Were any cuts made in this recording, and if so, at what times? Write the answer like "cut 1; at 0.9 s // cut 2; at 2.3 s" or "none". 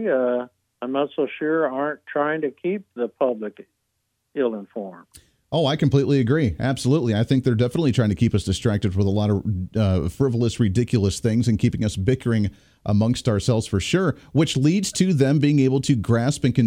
none